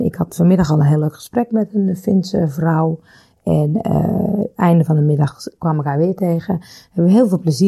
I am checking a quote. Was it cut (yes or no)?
no